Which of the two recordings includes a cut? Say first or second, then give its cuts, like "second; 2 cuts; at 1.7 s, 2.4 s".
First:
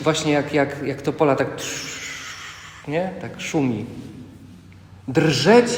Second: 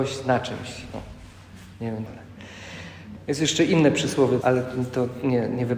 second; 3 cuts; at 2.1 s, 3.2 s, 4.4 s